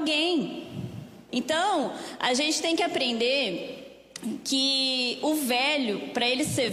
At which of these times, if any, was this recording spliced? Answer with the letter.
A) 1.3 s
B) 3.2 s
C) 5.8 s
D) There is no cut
A